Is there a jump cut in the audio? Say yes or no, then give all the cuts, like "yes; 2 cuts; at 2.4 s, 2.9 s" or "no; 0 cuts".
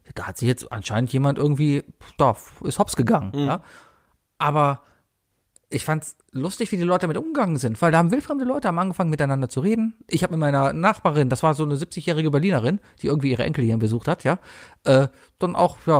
no; 0 cuts